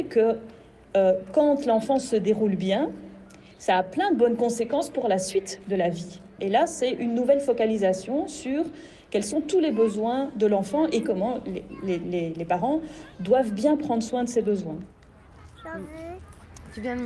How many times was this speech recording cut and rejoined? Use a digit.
1